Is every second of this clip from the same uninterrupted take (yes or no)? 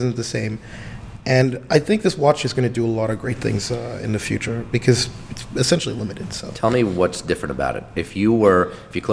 yes